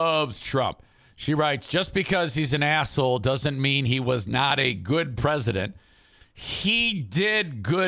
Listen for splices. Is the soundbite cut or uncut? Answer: uncut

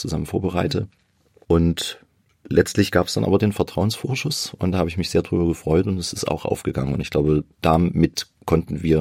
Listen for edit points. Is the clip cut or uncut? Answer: cut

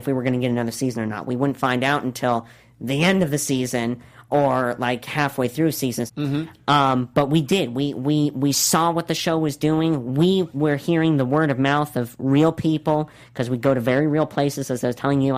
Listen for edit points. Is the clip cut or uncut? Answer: cut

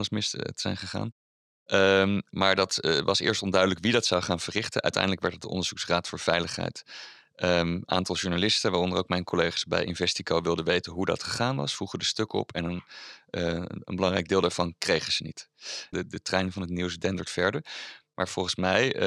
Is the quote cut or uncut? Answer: cut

